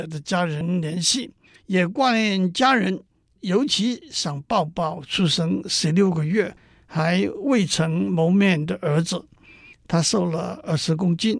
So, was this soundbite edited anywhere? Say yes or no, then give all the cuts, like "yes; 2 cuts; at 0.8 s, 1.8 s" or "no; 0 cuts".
yes; 1 cut; at 1.5 s